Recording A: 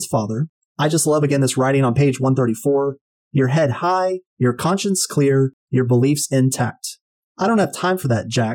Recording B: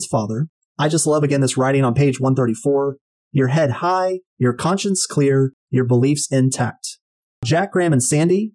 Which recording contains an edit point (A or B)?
A